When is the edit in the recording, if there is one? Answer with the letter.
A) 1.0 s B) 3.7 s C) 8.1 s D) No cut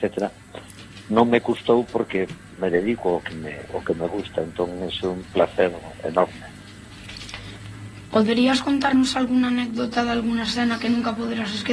D